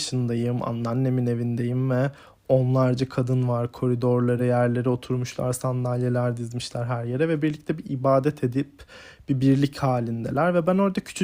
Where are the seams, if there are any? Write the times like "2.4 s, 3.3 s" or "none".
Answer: 4.4 s